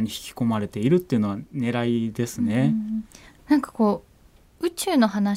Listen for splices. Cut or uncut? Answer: cut